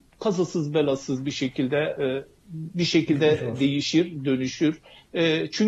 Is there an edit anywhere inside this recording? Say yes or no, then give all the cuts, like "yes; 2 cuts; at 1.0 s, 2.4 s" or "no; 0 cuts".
yes; 1 cut; at 2.0 s